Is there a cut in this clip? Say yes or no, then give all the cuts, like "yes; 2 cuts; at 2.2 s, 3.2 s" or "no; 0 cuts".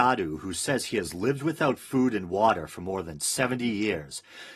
no; 0 cuts